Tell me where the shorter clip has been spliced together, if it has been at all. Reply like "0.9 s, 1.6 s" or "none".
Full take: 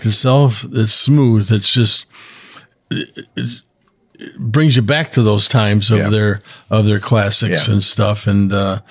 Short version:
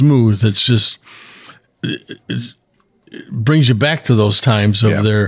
none